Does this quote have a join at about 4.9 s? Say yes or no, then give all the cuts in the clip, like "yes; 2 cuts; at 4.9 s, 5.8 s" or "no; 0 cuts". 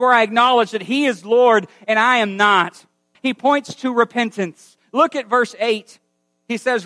no; 1 cut; at 3.1 s